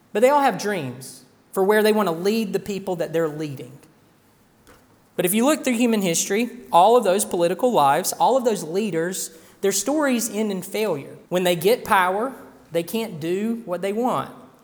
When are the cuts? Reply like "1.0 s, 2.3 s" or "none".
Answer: 11.3 s

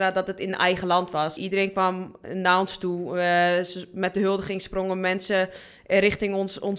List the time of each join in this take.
1.4 s

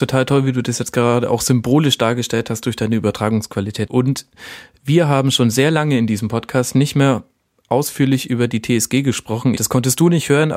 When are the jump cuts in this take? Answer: 3.9 s, 9.6 s

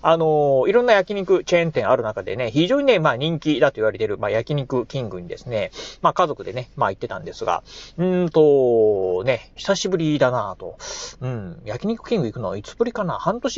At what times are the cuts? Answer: 9.6 s

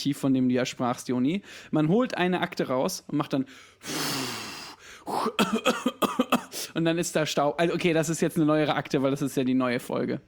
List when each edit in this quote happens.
none

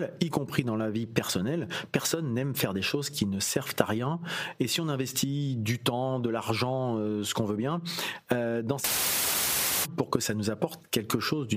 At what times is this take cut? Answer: none

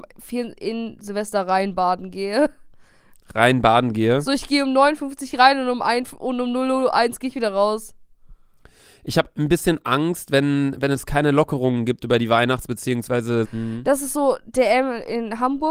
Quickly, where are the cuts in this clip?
13.4 s

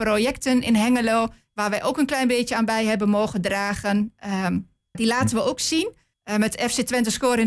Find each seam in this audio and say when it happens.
4.9 s, 6.1 s

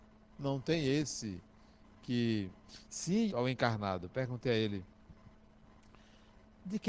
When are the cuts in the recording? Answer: 3.3 s

